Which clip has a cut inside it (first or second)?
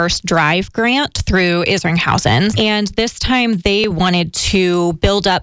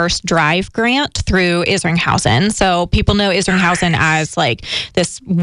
first